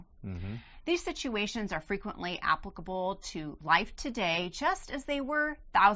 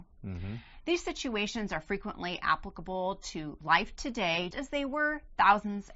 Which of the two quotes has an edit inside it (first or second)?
second